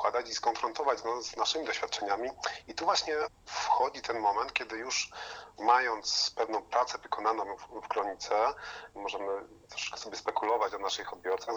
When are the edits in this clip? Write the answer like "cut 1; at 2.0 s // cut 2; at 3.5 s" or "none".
cut 1; at 3.4 s